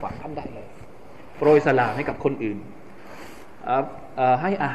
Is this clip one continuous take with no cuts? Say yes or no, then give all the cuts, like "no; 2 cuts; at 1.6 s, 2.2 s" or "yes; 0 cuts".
yes; 0 cuts